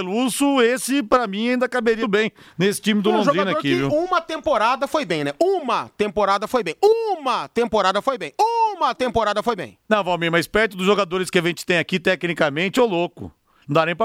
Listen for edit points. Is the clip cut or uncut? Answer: cut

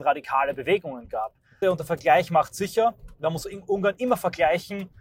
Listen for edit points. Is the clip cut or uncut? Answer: cut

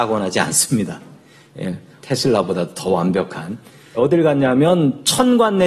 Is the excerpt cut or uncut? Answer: cut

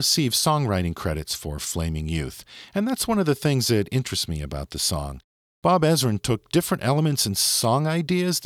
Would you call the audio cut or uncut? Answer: uncut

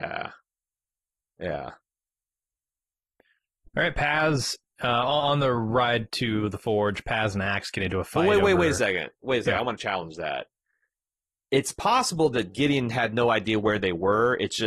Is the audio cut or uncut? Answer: uncut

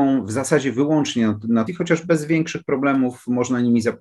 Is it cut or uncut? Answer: cut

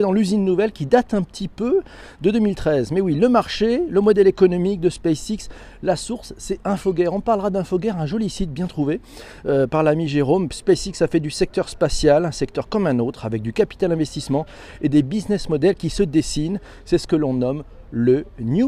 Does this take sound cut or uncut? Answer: uncut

